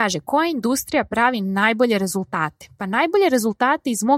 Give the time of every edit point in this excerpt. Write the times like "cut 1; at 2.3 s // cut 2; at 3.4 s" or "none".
none